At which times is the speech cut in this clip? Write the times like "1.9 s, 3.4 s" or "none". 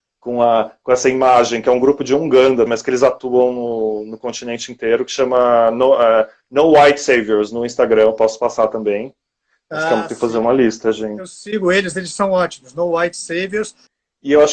2.7 s